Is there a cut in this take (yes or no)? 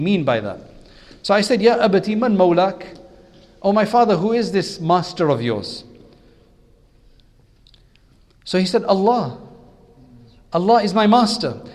no